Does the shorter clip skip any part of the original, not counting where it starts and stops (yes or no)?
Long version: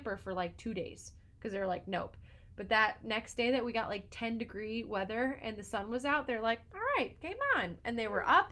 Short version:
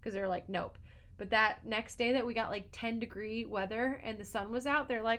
no